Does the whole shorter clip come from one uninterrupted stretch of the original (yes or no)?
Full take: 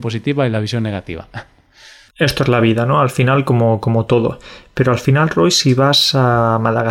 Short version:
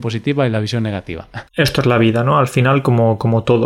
no